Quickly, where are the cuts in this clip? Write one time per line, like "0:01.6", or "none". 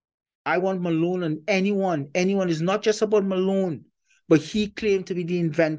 none

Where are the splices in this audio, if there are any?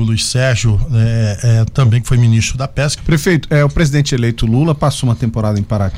0:03.0

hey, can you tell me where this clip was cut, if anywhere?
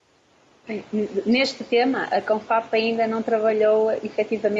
none

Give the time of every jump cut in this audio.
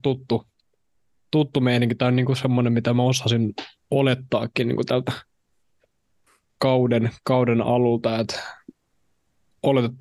none

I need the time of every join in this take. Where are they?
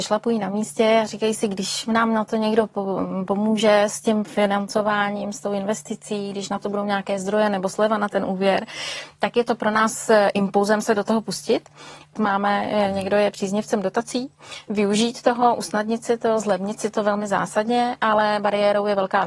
0:12.1

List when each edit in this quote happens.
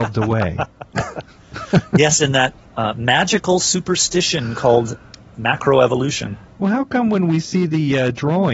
none

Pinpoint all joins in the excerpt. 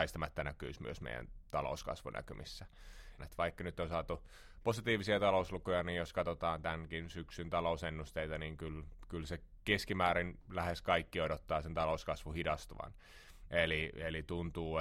0:03.2
0:13.5

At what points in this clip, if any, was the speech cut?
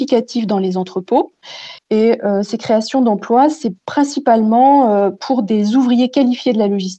0:01.8

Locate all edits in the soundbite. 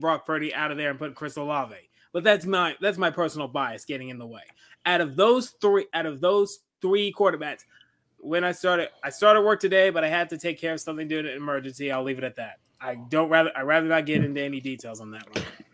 0:08.2

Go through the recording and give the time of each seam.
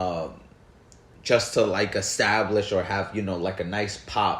none

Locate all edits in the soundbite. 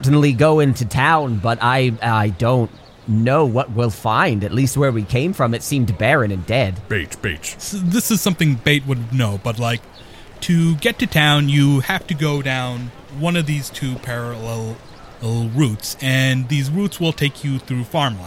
none

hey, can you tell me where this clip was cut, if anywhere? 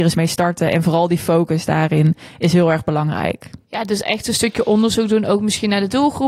0:03.6

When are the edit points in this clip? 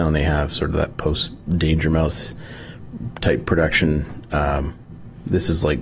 none

